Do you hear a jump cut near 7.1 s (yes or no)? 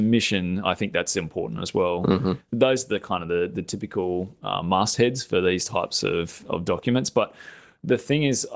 no